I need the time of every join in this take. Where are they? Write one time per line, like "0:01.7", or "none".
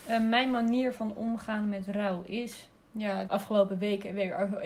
0:03.2